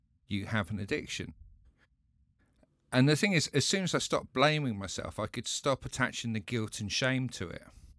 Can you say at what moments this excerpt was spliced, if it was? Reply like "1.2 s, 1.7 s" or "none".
none